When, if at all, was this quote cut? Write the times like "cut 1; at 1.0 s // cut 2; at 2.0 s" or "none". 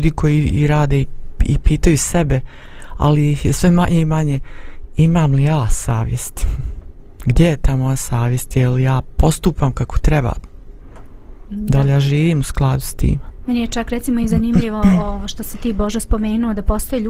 none